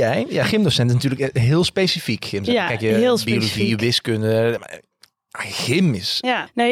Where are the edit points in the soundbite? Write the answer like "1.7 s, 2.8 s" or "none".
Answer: 4.6 s